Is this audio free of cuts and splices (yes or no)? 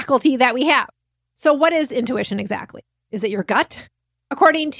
yes